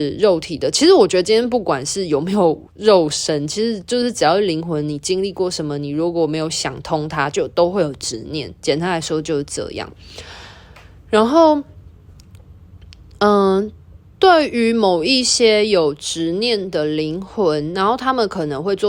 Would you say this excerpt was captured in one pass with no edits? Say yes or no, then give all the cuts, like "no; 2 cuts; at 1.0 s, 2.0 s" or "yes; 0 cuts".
yes; 0 cuts